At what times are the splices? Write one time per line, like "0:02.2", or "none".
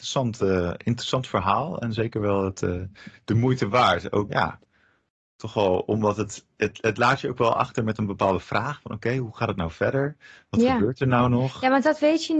0:04.3

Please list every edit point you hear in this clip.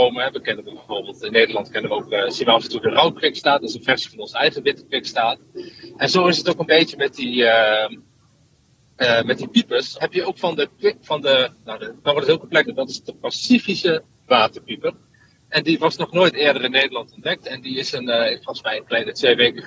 0:10.0
0:12.6

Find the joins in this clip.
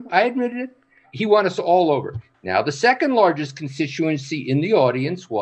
0:02.3

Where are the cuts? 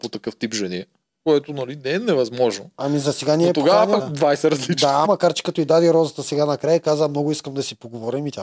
0:04.0
0:05.0

